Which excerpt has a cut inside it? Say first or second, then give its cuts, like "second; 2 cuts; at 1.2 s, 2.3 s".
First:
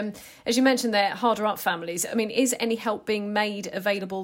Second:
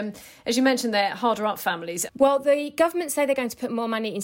second; 1 cut; at 2.1 s